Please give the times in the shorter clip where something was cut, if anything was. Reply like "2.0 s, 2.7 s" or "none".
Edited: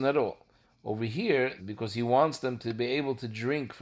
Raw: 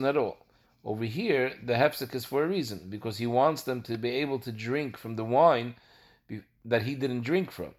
1.6 s